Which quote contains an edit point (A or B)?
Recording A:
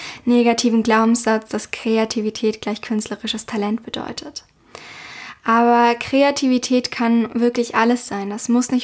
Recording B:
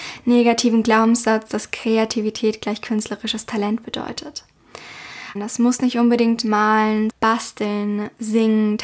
B